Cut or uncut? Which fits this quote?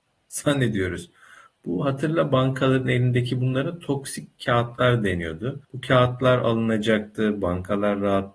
cut